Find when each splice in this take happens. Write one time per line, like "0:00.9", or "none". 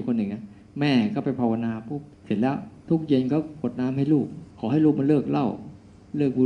0:02.1
0:04.5